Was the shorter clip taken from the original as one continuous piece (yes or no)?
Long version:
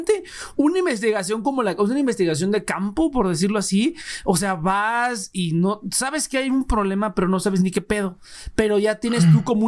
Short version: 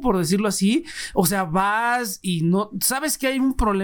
yes